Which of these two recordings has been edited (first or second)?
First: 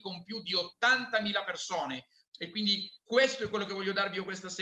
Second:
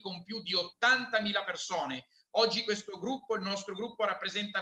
first